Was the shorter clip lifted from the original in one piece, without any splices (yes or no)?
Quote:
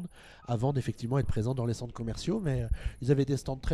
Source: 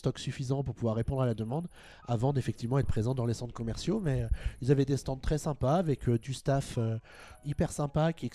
yes